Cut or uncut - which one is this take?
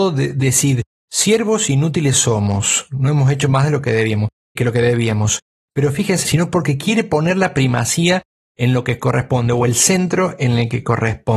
cut